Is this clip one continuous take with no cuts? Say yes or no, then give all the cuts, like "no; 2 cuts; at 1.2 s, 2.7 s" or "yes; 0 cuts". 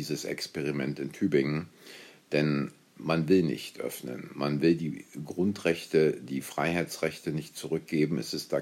yes; 0 cuts